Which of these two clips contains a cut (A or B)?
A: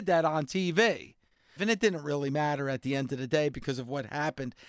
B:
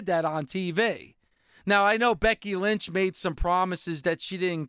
A